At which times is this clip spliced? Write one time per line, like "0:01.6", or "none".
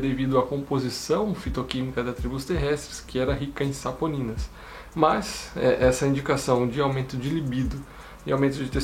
0:04.9

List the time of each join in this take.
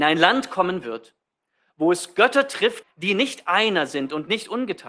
0:02.8

